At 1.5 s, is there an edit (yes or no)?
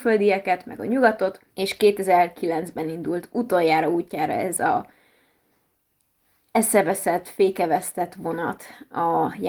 yes